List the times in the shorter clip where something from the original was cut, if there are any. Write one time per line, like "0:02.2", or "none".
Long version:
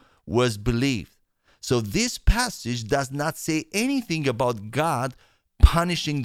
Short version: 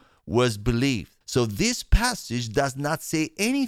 0:01.2